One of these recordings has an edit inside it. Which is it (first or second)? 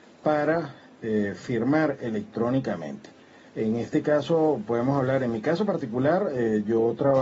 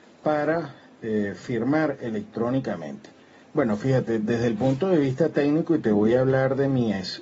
second